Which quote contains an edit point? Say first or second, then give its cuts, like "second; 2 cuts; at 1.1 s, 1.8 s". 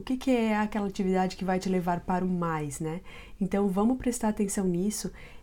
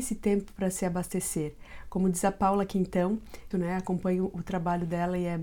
second; 1 cut; at 3.5 s